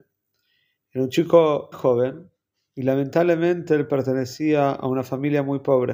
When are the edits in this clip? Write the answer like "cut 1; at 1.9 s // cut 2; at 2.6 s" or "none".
cut 1; at 1.7 s